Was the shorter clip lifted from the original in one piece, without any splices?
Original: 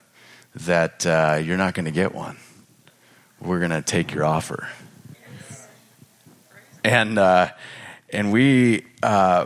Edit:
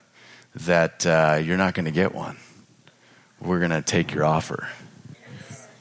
yes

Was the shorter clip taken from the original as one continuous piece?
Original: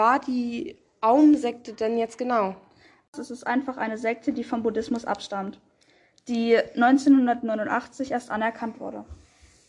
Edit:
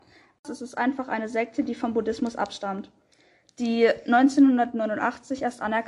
yes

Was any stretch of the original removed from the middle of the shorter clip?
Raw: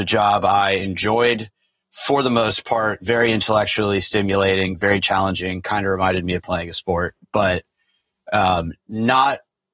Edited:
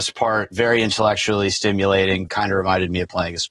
yes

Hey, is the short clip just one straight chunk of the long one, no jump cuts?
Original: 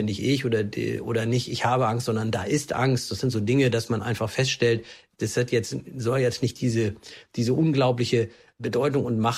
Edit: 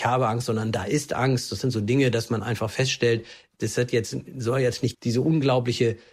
no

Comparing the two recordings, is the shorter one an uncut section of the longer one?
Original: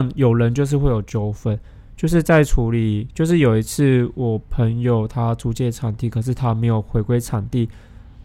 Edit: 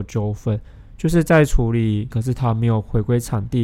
no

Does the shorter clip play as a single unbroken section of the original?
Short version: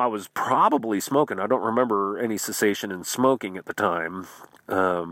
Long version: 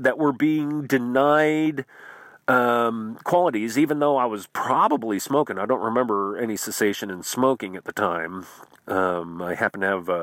yes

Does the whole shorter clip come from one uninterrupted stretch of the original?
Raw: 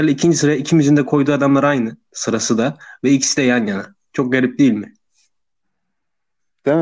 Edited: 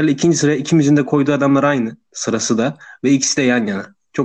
yes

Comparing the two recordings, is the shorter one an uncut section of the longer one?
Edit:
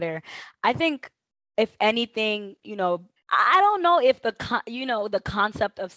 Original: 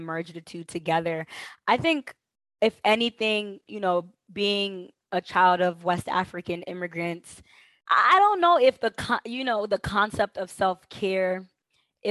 no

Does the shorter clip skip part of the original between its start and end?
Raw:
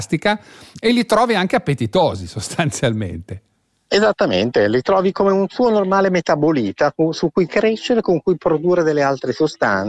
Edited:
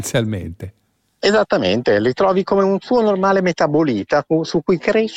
no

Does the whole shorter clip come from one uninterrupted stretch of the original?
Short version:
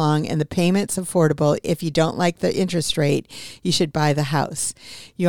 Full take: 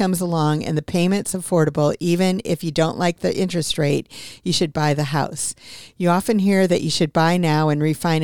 no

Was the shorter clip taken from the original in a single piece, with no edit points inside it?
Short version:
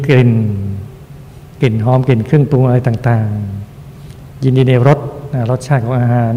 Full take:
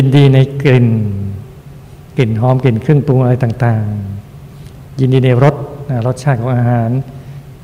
yes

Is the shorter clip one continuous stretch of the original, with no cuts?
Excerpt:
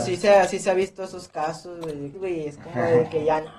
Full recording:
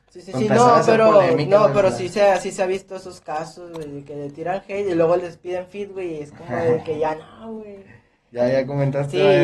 no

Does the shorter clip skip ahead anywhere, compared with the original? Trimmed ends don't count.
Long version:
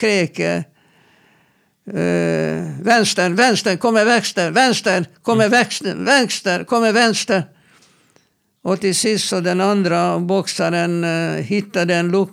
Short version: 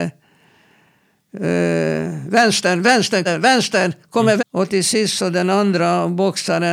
yes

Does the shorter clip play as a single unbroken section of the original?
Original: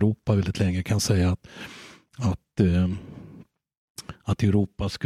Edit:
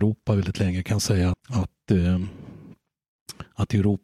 no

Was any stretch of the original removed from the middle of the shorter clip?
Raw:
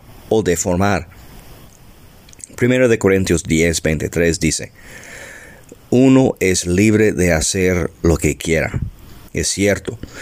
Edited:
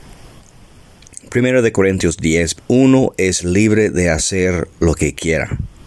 yes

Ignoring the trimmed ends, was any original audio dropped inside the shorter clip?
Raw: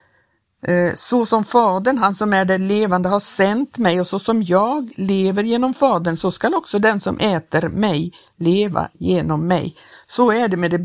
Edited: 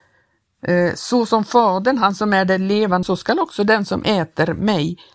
yes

